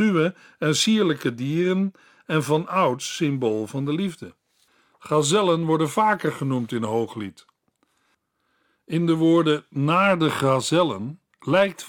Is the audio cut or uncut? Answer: uncut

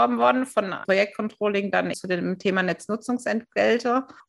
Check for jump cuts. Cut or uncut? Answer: cut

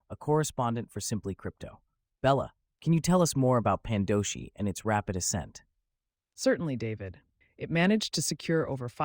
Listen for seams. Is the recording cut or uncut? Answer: cut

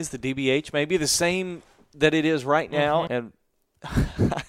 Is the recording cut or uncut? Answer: cut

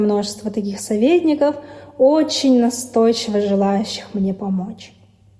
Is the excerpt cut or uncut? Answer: uncut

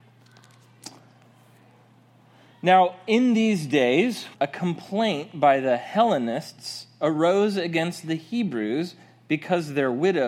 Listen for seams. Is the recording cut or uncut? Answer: cut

